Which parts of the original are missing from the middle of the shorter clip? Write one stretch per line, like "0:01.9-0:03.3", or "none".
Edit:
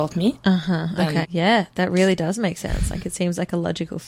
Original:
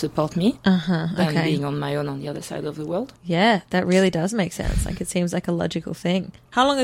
0:01.4-0:03.2